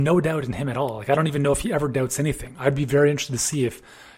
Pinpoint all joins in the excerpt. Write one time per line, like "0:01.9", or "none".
none